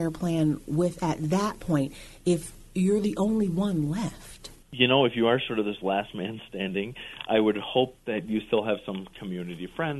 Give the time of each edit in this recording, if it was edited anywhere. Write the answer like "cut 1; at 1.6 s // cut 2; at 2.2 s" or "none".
cut 1; at 4.6 s